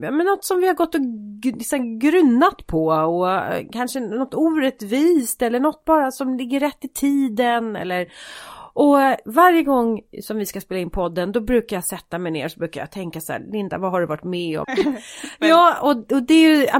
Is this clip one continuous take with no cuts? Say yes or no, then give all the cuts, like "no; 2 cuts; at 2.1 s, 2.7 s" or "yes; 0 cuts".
no; 1 cut; at 14.6 s